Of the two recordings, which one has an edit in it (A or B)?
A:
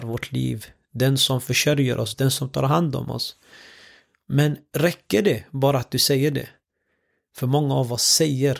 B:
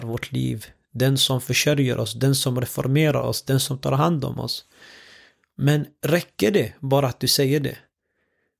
A